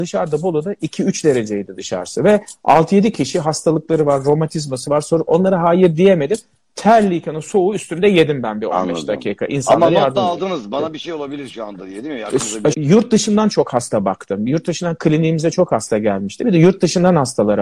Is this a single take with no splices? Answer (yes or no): no